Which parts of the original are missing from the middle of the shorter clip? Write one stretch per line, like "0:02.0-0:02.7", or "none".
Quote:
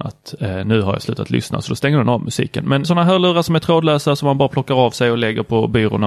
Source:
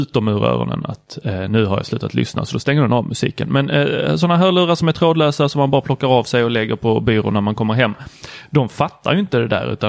0:03.7-0:04.2

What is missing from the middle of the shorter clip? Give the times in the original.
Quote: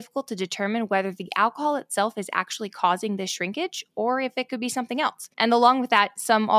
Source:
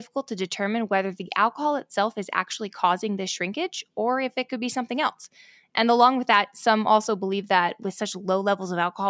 0:05.3-0:05.7

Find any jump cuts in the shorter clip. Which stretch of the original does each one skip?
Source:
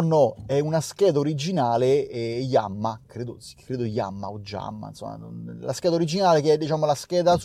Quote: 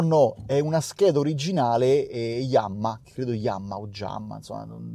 0:03.0-0:03.6

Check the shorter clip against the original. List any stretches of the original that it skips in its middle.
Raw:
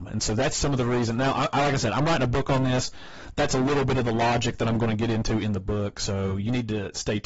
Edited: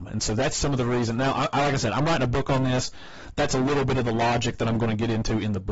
none

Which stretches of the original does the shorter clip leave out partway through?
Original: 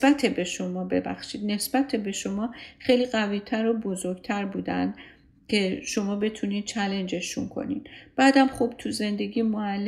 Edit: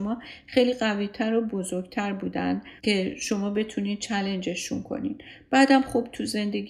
0:05.1-0:05.4

